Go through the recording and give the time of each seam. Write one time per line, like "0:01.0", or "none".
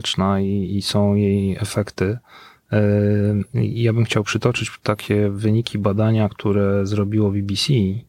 none